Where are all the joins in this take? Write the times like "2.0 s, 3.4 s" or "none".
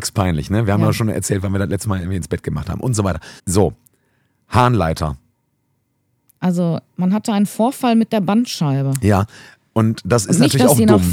3.4 s, 6.4 s